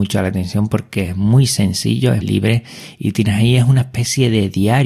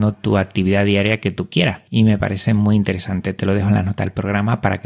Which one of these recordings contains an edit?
first; 1 cut; at 2.2 s

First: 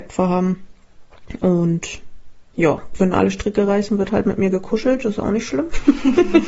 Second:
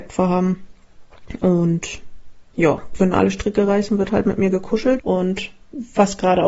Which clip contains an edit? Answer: second; 1 cut; at 5.0 s

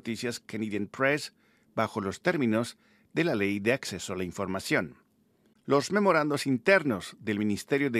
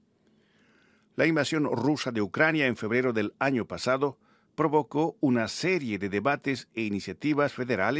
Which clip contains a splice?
first; 1 cut; at 5.5 s

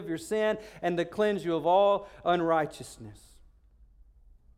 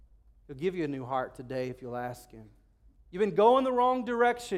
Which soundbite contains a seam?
second; 1 cut; at 2.9 s

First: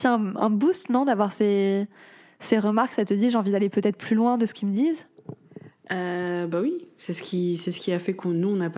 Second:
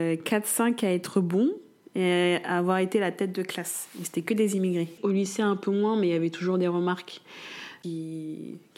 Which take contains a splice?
second; 1 cut; at 5.0 s

